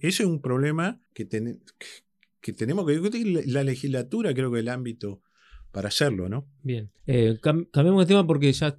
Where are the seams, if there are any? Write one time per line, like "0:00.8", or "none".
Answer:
0:01.1
0:07.0